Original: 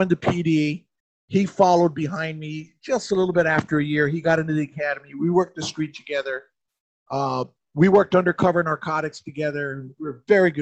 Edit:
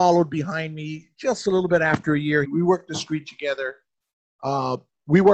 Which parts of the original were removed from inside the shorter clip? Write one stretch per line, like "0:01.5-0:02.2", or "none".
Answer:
0:04.1-0:05.1